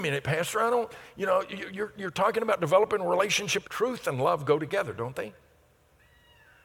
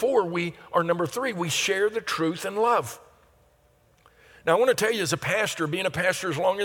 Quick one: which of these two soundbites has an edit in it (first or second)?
first